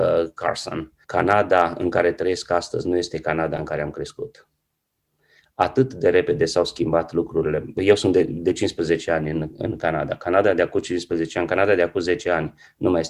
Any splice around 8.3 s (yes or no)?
no